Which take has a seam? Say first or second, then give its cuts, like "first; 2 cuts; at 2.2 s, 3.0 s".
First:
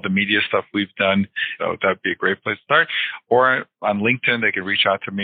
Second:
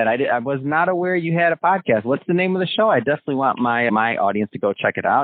first; 1 cut; at 1.6 s